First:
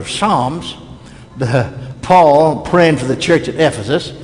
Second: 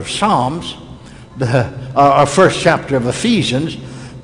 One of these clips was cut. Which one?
first; 1 cut; at 1.9 s

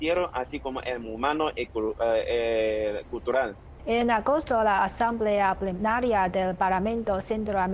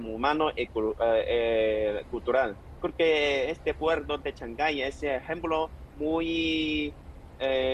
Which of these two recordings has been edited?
first; 1 cut; at 3.8 s

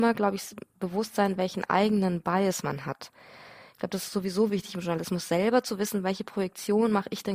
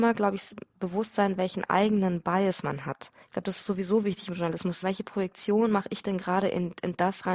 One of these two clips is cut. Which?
second; 2 cuts; at 3.2 s, 4.8 s

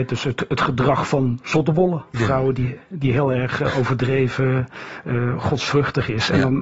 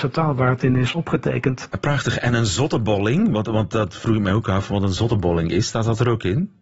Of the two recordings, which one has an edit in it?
first; 1 cut; at 2.1 s

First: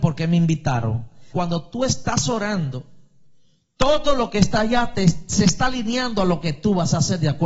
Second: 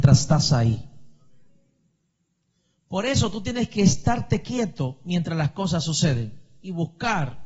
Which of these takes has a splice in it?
first; 1 cut; at 1.3 s

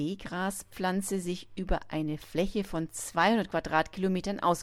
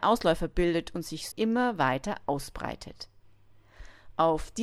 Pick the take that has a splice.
second; 1 cut; at 1.3 s

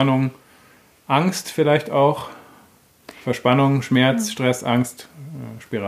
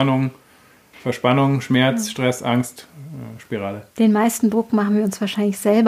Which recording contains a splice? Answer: second; 2 cuts; at 0.9 s, 3.9 s

